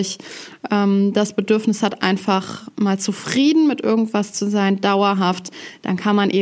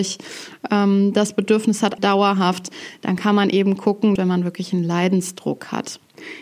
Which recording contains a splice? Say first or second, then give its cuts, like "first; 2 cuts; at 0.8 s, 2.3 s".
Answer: second; 2 cuts; at 2.0 s, 4.2 s